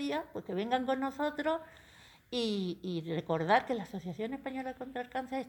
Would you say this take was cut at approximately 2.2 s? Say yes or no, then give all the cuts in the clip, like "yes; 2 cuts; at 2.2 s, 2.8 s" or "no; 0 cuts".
no; 0 cuts